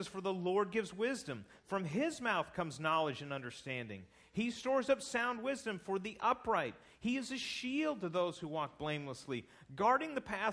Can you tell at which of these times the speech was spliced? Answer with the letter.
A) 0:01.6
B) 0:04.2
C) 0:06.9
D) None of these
D